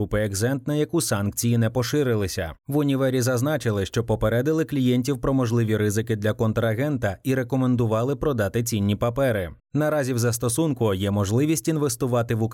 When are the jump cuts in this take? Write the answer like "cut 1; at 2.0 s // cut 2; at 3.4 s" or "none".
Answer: none